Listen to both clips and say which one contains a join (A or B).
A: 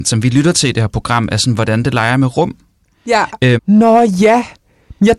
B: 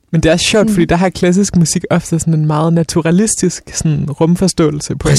A